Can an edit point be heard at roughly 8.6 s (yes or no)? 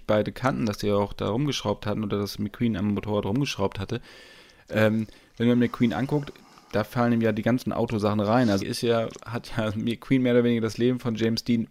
yes